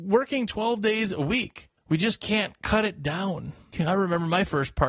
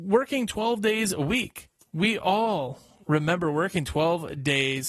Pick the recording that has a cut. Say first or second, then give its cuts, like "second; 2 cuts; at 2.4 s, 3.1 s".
first; 2 cuts; at 1.8 s, 3.7 s